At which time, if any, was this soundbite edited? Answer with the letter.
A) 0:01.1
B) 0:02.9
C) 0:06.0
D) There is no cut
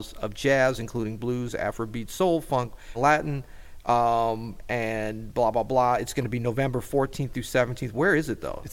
B